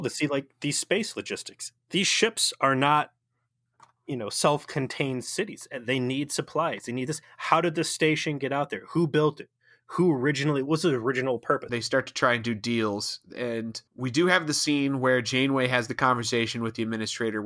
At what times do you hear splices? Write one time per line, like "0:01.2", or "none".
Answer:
0:11.7
0:13.9